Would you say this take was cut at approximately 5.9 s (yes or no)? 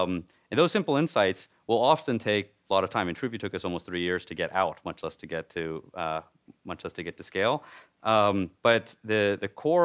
no